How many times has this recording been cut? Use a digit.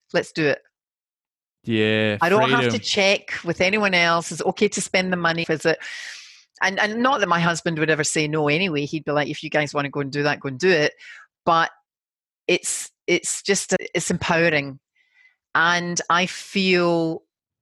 1